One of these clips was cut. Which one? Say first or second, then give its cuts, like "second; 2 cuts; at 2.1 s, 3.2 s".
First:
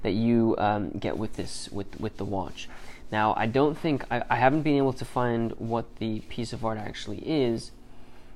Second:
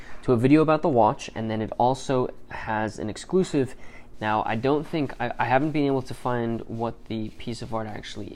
second; 1 cut; at 4.1 s